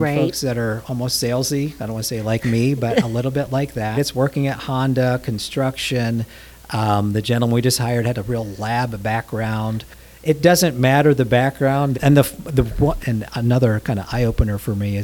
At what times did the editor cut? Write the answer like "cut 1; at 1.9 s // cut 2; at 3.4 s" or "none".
cut 1; at 3.9 s // cut 2; at 11.9 s // cut 3; at 13.0 s

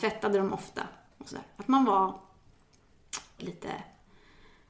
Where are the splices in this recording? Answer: cut 1; at 3.4 s

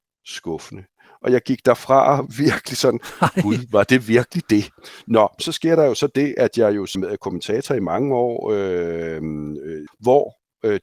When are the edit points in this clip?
cut 1; at 6.9 s // cut 2; at 9.9 s

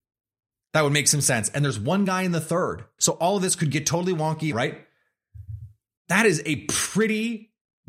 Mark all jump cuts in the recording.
cut 1; at 3.0 s // cut 2; at 4.5 s

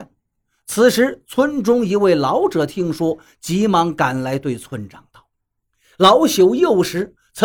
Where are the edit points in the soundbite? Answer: none

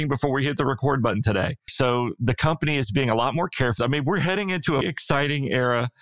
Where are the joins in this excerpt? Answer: cut 1; at 1.7 s // cut 2; at 3.8 s // cut 3; at 4.8 s

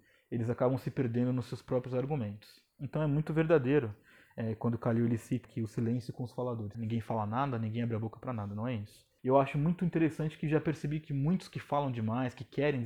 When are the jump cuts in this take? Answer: cut 1; at 5.4 s // cut 2; at 6.7 s // cut 3; at 9.2 s

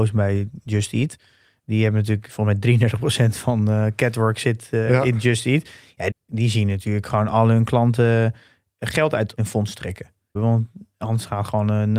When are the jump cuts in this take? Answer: cut 1; at 6.1 s // cut 2; at 10.4 s

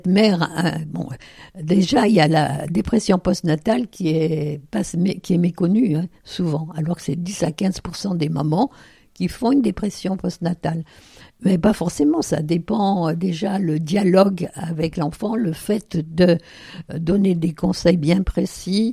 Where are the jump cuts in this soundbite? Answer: none

